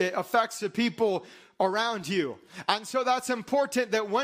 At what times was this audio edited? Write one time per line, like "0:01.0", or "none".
none